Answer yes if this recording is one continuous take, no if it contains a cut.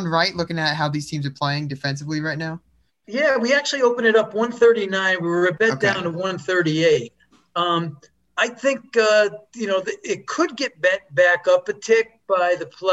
yes